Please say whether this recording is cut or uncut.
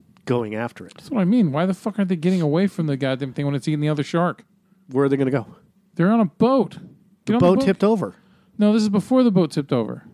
uncut